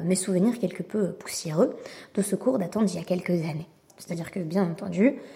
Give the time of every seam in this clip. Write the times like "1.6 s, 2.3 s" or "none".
3.9 s